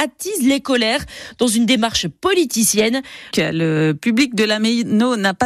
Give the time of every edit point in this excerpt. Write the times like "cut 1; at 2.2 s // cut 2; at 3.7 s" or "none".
cut 1; at 3.3 s